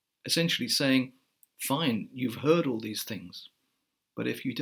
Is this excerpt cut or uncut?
uncut